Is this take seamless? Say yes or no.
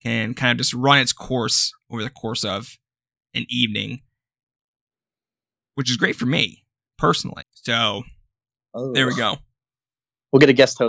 no